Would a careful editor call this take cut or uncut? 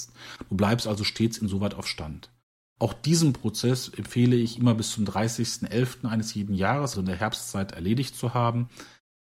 cut